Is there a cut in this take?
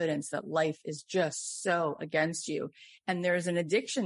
no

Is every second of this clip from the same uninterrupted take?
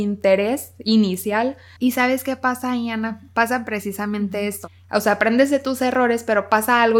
no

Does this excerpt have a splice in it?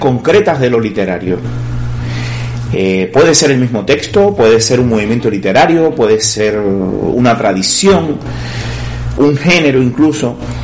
no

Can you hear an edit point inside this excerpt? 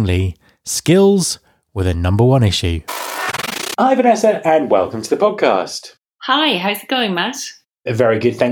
no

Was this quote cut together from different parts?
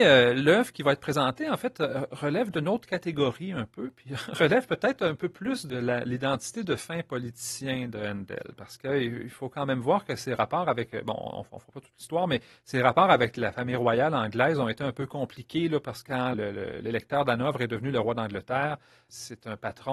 yes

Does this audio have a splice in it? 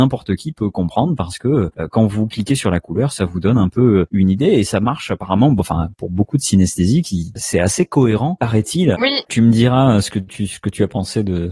yes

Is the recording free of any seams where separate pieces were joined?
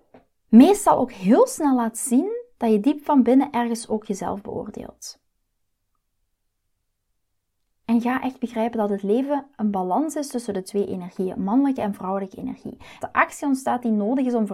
no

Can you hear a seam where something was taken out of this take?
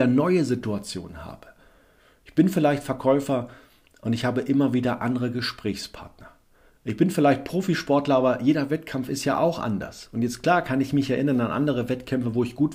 no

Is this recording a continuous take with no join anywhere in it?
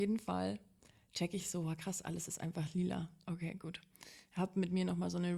yes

